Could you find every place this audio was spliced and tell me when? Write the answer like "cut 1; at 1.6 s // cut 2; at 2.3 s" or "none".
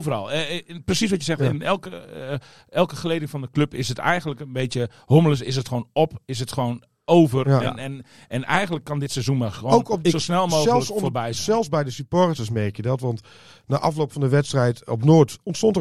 none

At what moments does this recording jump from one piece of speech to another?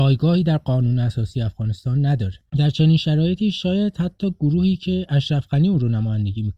cut 1; at 2.5 s

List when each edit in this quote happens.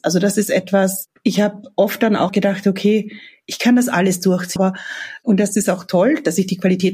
cut 1; at 2.3 s // cut 2; at 4.6 s

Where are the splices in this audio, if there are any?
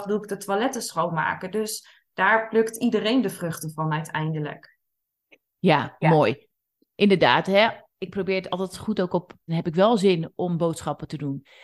cut 1; at 9.5 s

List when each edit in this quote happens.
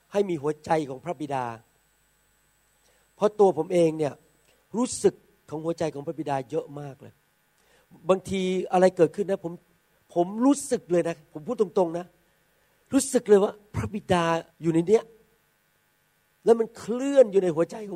cut 1; at 14.5 s

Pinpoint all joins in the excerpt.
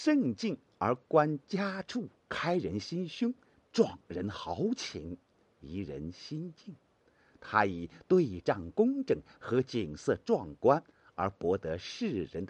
none

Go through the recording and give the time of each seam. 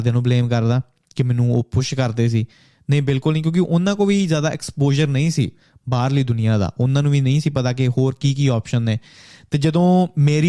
none

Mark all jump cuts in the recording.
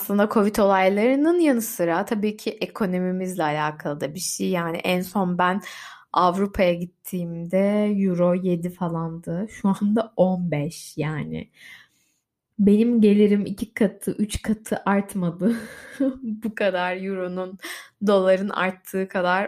none

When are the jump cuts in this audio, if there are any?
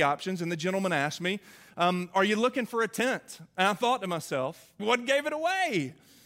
cut 1; at 4.8 s

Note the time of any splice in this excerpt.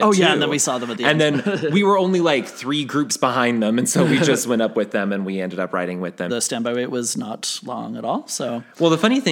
cut 1; at 6.3 s

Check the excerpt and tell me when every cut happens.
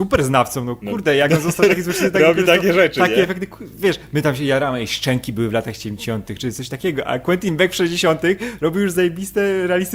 none

